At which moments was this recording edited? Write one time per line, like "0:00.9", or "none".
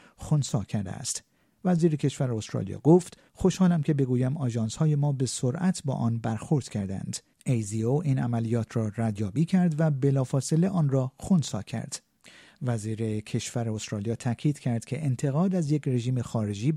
0:03.3